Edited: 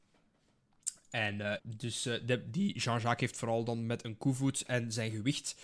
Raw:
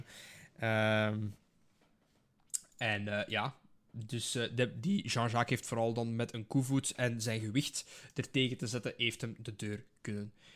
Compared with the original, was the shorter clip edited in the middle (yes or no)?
yes